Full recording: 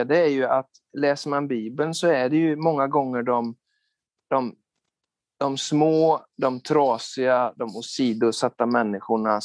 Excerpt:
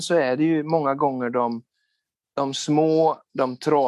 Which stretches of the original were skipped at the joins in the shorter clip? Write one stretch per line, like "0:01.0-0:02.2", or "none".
0:04.1-0:05.3